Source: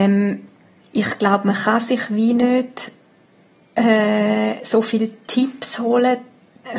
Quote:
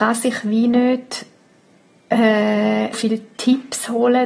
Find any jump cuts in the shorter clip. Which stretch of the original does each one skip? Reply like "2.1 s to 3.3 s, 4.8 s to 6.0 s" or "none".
4.6 s to 4.8 s